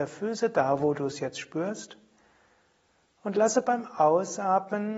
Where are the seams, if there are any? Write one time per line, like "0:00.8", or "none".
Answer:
none